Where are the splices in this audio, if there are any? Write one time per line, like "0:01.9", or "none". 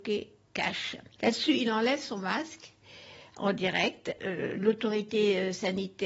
0:01.2
0:04.2